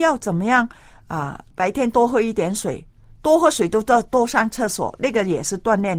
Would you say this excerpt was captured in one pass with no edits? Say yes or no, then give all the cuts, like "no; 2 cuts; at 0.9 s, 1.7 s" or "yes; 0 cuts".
no; 1 cut; at 1.5 s